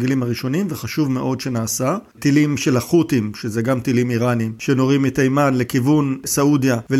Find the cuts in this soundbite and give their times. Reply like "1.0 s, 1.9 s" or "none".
2.1 s